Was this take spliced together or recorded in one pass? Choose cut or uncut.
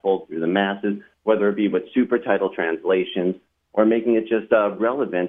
uncut